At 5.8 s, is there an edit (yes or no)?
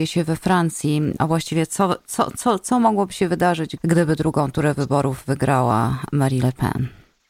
no